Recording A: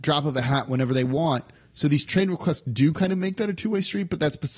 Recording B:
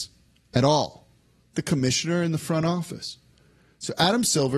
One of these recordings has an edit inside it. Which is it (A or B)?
B